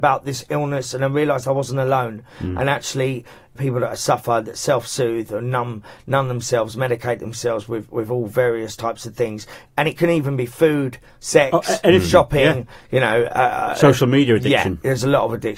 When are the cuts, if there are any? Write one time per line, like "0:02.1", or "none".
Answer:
0:03.6